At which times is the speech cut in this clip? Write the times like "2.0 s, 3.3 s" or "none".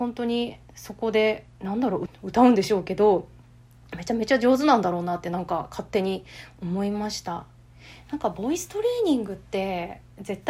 2.1 s